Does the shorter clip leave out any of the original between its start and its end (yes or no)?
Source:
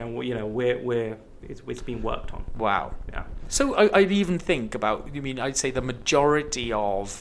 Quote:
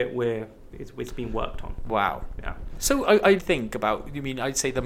yes